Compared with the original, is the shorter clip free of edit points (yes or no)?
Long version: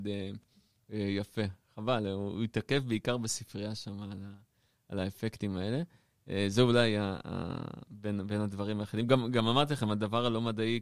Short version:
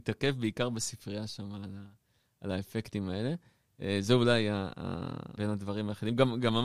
no